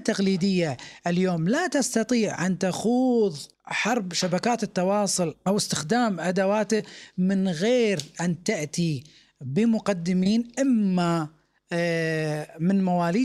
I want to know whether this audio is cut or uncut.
cut